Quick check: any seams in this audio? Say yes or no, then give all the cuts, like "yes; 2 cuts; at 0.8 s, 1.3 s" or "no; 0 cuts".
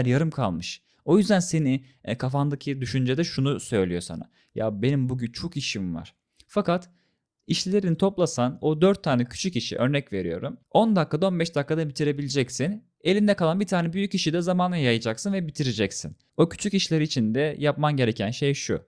no; 0 cuts